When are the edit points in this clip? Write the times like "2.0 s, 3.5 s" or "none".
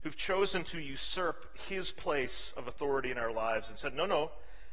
none